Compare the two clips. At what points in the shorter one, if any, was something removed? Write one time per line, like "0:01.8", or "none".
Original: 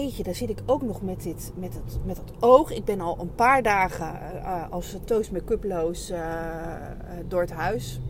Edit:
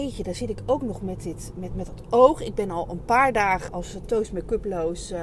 0:01.7
0:03.7